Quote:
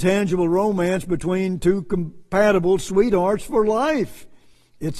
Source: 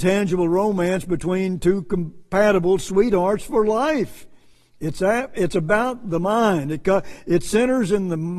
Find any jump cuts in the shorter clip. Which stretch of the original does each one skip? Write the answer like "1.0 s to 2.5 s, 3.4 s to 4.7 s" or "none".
none